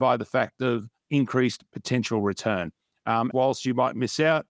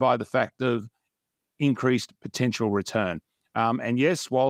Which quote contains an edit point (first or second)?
first